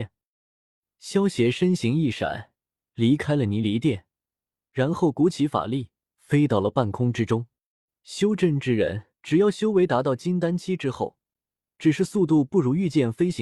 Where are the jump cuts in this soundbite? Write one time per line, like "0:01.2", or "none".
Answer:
0:09.2
0:11.7